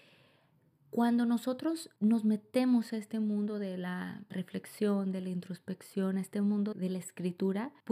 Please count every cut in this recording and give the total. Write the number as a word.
one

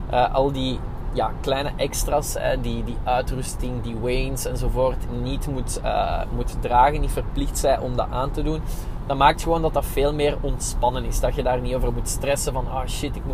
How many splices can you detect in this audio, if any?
zero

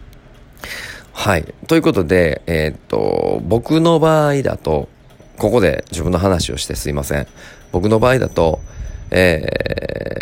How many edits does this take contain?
zero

